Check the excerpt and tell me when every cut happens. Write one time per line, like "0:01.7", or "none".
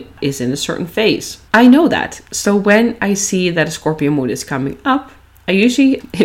0:01.5